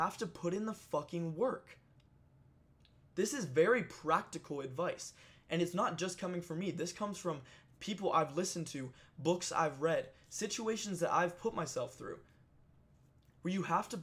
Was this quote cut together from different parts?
no; 0 cuts

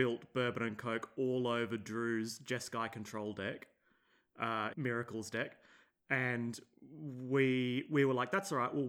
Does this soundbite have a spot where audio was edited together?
yes; 1 cut; at 4.7 s

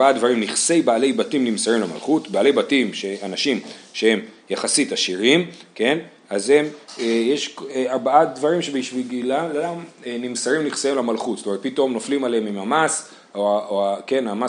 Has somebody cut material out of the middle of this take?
no; 0 cuts

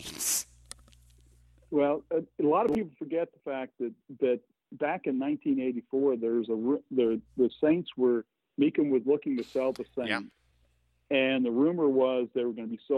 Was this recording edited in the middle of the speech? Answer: no; 0 cuts

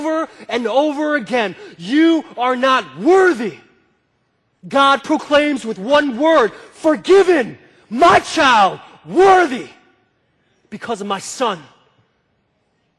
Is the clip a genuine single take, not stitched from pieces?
yes; 0 cuts

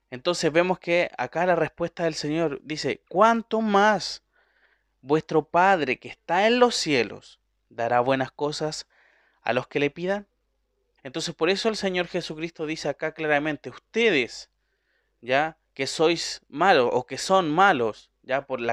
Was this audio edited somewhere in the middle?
yes; 1 cut; at 11.0 s

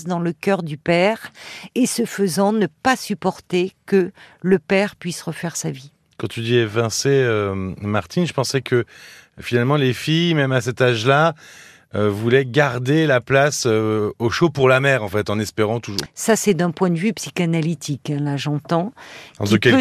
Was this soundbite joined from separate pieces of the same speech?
yes; 1 cut; at 16.1 s

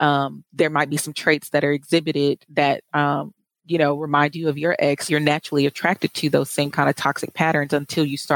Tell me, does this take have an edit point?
yes; 1 cut; at 5.1 s

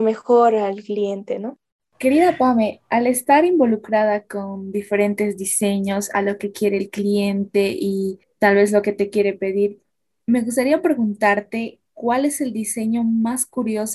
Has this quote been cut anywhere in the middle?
no; 0 cuts

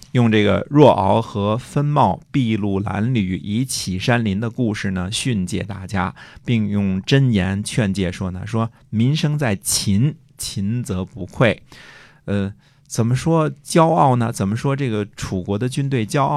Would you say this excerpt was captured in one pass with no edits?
yes; 0 cuts

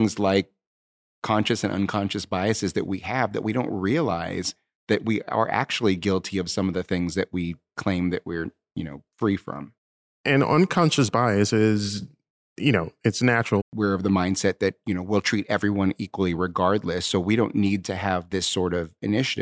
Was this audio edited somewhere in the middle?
yes; 1 cut; at 13.6 s

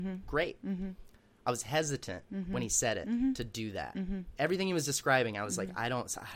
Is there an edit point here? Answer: no; 0 cuts

